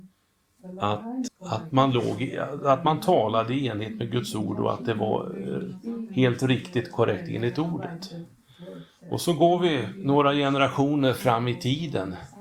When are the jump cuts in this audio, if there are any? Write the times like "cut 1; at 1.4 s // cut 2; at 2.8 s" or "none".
cut 1; at 1.3 s